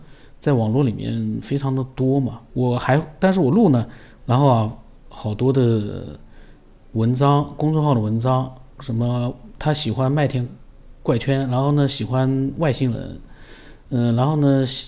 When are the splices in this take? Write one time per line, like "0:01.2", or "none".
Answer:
0:02.5
0:04.2